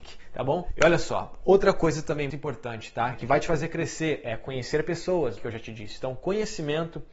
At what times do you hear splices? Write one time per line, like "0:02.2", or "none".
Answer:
0:02.3
0:05.4